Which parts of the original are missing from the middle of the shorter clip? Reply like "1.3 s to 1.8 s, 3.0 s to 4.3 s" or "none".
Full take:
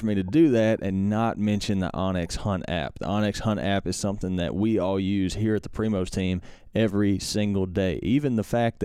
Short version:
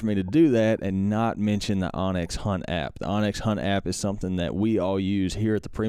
none

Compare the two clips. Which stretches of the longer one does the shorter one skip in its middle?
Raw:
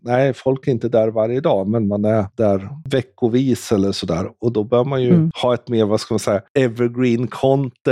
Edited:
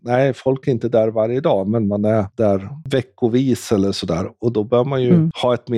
none

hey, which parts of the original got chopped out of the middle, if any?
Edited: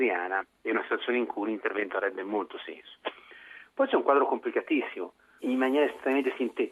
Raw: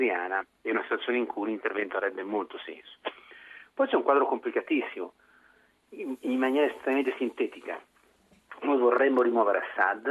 5.4 s to 6.2 s

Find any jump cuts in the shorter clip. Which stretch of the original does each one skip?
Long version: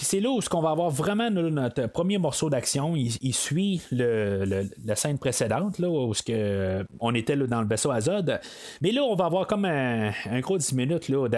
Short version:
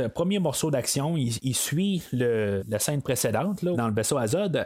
4.4 s to 4.8 s, 5.9 s to 7.5 s

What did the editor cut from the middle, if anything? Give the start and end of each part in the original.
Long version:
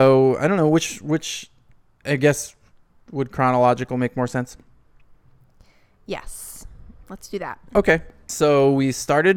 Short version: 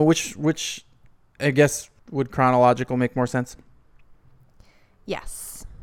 2.6 s to 3.0 s

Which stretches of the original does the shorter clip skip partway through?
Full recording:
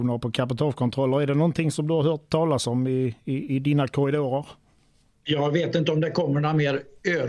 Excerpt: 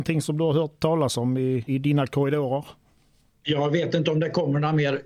3.2 s to 3.5 s

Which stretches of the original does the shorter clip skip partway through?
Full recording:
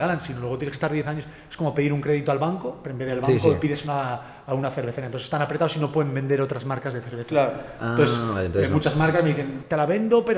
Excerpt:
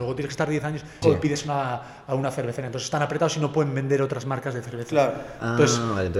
1.4 s to 3.4 s

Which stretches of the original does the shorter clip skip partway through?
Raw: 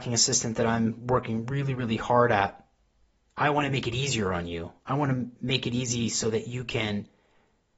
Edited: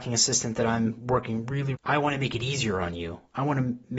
1.7 s to 3.3 s

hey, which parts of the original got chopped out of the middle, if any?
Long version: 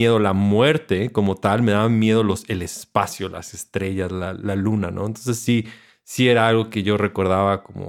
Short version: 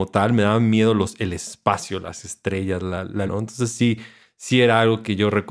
4.5 s to 4.9 s

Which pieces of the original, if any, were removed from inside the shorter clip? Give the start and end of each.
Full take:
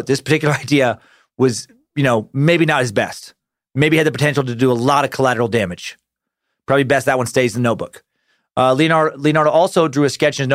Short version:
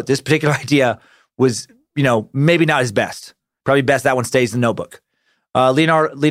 3.6 s to 6.6 s

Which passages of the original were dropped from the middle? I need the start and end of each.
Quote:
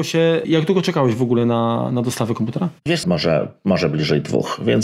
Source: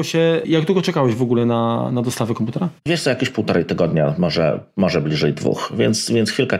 3.0 s to 4.2 s

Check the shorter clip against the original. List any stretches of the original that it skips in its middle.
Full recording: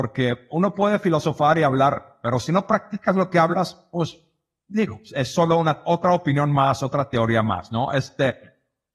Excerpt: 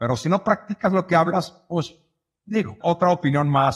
5.0 s to 5.8 s

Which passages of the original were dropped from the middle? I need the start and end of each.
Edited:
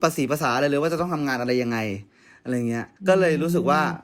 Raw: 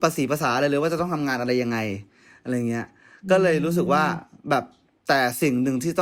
3.0 s to 3.2 s

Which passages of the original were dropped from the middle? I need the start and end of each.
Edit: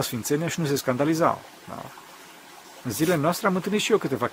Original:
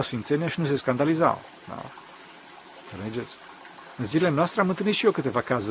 2.8 s to 3.9 s

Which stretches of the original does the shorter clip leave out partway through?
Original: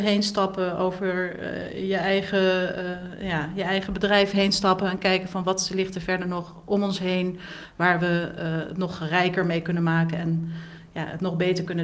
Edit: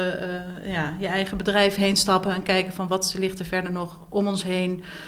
none

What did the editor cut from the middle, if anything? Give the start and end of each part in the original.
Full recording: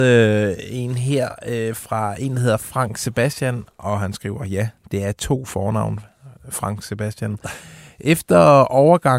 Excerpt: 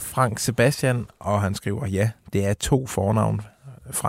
none

